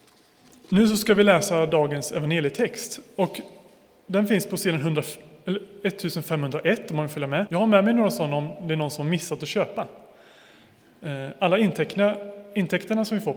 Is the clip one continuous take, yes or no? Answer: no